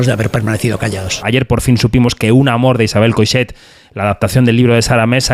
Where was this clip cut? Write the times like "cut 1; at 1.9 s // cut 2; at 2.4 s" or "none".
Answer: cut 1; at 1.2 s